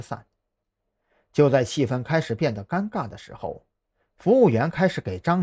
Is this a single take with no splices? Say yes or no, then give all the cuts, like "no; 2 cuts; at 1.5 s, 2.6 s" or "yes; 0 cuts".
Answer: yes; 0 cuts